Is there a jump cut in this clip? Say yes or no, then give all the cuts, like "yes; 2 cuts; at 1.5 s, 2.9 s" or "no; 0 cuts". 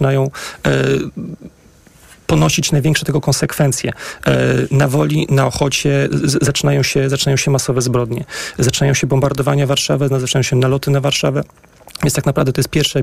no; 0 cuts